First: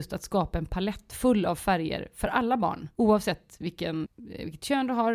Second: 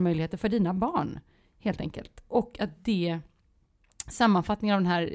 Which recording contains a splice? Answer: first; 2 cuts; at 2.9 s, 4.0 s

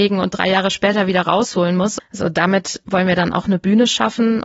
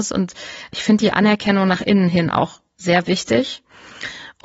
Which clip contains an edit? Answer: first; 1 cut; at 2.0 s

